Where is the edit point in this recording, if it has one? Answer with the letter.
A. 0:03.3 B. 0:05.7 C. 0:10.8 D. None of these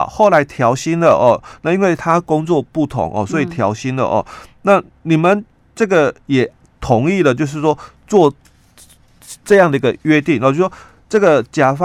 D